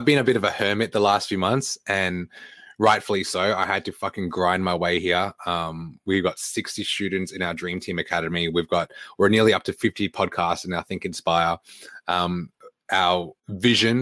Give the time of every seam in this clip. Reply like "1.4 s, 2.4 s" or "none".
none